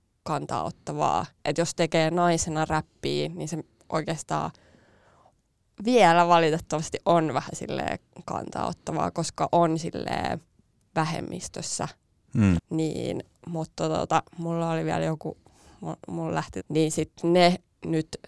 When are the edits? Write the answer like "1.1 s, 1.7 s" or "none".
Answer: 12.6 s, 16.6 s

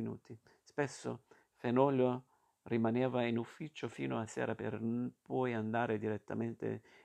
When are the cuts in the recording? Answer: 1.4 s

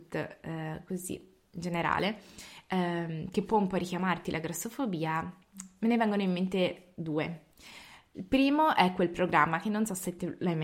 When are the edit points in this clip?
none

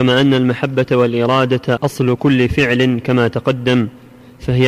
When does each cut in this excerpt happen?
1.8 s

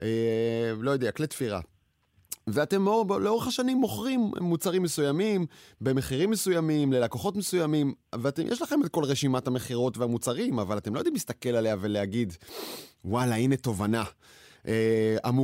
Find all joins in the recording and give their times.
none

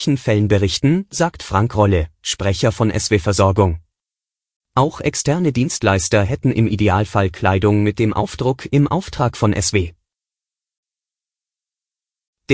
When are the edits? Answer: 4.6 s

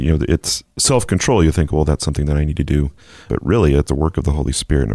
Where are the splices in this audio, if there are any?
3.3 s

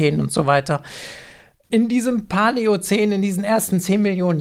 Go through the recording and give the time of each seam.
none

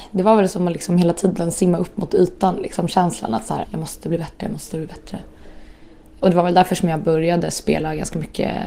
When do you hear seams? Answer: 3.6 s

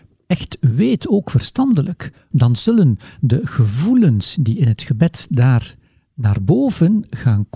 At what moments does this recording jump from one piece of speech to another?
2.3 s

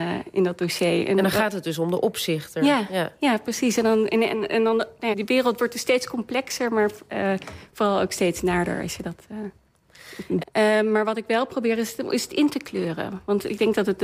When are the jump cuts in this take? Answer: 5.1 s, 10.4 s

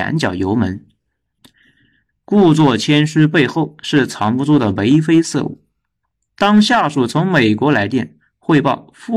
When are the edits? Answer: 1.4 s

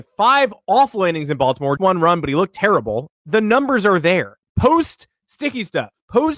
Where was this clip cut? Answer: 1.8 s, 3.1 s

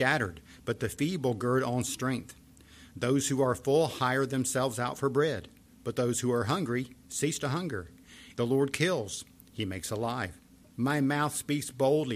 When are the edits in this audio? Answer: 8.3 s, 10.7 s

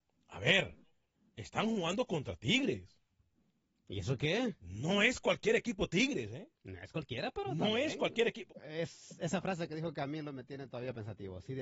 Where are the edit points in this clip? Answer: 8.5 s

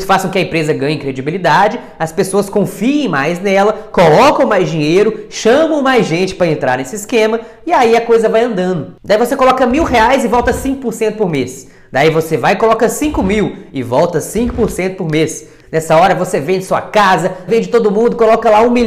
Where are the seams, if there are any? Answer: 15.6 s, 17.5 s

